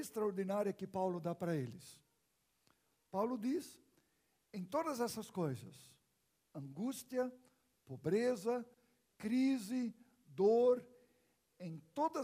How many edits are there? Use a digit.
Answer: 1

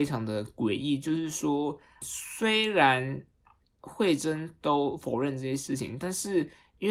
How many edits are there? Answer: 1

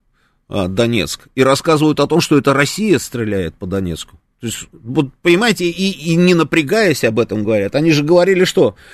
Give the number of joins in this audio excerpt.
0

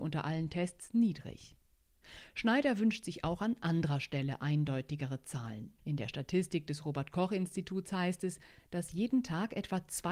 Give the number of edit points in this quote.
1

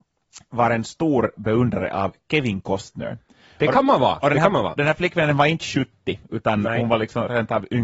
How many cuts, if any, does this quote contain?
1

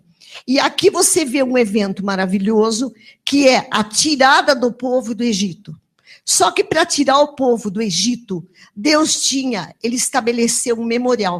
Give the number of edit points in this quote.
0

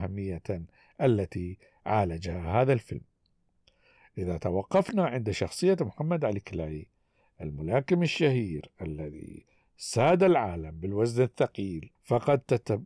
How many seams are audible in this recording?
1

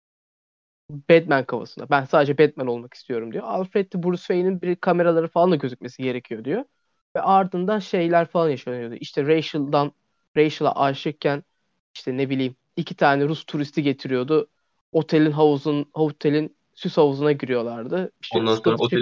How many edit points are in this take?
0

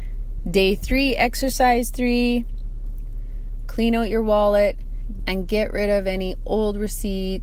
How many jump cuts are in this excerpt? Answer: 1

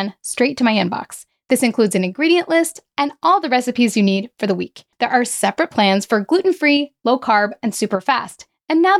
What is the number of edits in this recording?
3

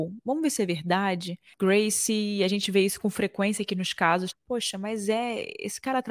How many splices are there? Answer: 2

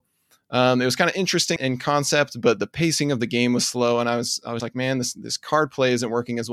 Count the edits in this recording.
2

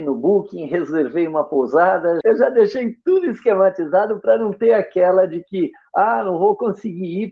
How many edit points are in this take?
1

